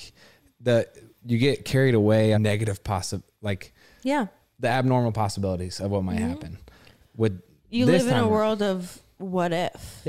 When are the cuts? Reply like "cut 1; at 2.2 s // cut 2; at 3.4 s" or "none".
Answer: cut 1; at 2.3 s